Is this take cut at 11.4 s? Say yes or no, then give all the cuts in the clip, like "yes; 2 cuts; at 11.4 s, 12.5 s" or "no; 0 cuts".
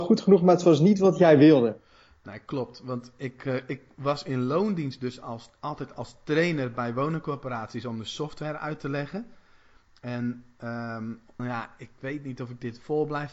yes; 1 cut; at 11.4 s